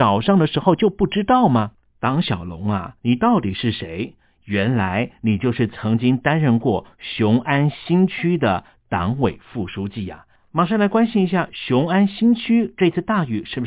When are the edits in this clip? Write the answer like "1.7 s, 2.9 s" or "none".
none